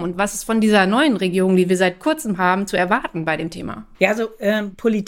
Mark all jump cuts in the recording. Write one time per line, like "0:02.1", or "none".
0:03.9

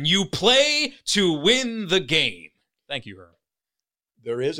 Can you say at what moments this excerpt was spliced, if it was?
none

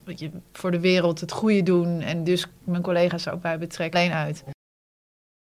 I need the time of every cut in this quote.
0:03.9

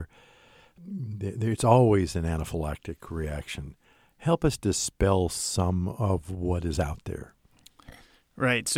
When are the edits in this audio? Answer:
none

